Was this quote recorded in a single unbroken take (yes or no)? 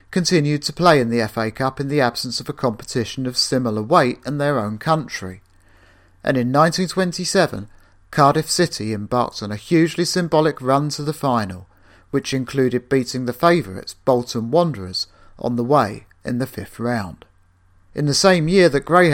no